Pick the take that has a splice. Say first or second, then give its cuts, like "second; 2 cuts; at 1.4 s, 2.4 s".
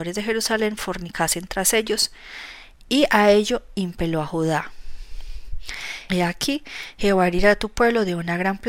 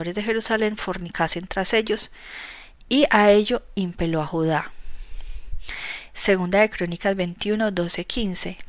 first; 1 cut; at 6.1 s